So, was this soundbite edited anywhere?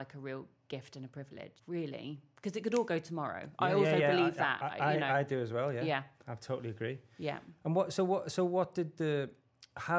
yes; 1 cut; at 1.6 s

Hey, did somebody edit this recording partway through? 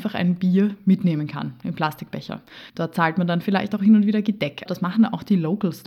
yes; 2 cuts; at 2.7 s, 4.7 s

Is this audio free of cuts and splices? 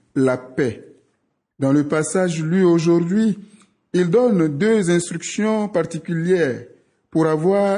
no; 1 cut; at 1.5 s

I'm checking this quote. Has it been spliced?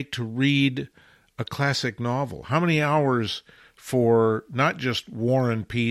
no; 0 cuts

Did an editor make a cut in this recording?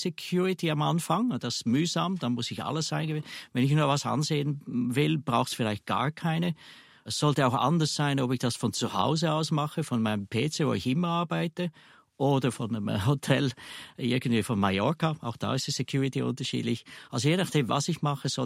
no; 0 cuts

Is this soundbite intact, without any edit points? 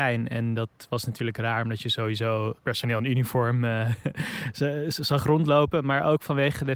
yes; 0 cuts

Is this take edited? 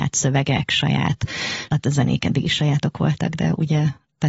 yes; 1 cut; at 1.7 s

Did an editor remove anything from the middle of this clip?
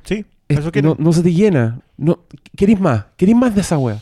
yes; 1 cut; at 1.8 s

